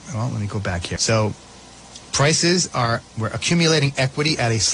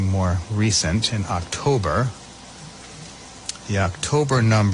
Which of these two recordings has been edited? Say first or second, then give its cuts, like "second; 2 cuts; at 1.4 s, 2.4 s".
first; 1 cut; at 1.0 s